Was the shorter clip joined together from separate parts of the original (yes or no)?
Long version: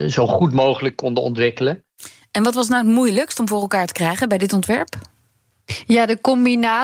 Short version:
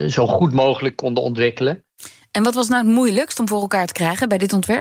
no